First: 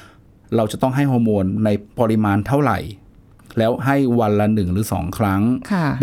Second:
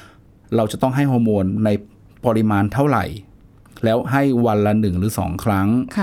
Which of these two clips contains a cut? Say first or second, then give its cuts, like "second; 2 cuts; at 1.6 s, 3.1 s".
first; 1 cut; at 1.9 s